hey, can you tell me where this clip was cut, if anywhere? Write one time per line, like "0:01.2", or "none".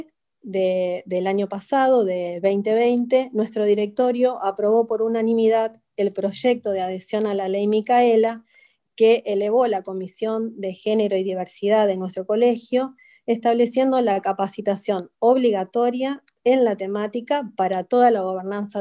none

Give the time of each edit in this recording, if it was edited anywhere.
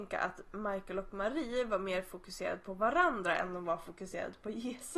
none

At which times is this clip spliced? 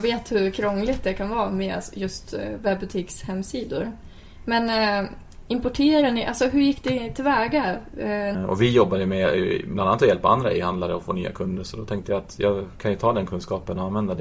0:08.3

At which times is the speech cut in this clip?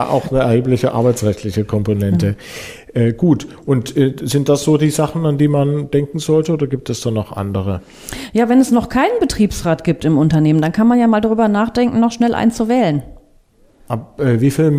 0:13.9

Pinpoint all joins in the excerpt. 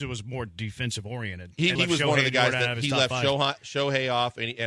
0:01.8

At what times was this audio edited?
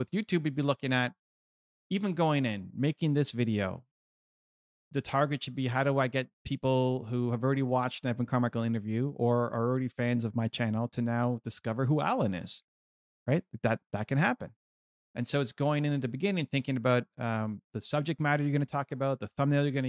none

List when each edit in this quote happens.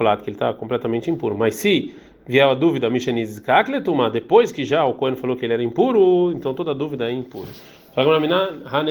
none

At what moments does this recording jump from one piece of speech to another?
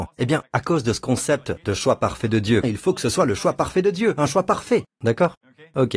0:02.6
0:04.8

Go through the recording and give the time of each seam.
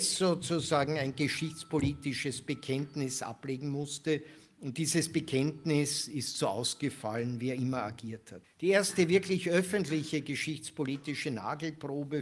0:08.4

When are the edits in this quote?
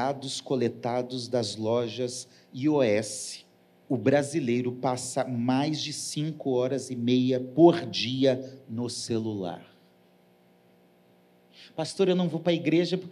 0:03.9

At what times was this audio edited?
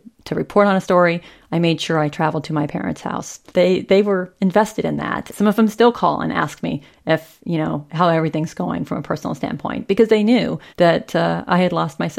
0:03.5
0:05.3
0:10.7

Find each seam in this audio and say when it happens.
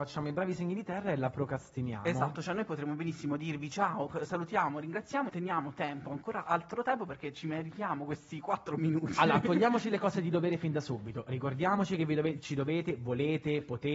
0:05.3

